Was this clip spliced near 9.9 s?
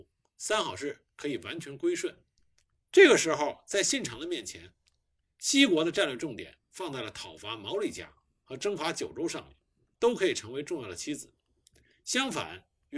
yes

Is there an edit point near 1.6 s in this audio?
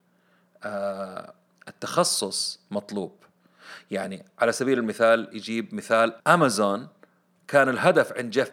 no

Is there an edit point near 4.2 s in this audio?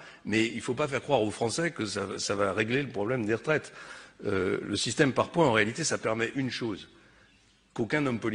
no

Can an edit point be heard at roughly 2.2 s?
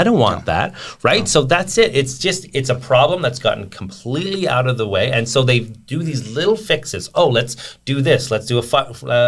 no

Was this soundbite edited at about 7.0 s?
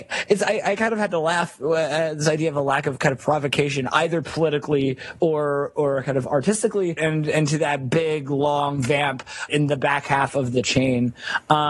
yes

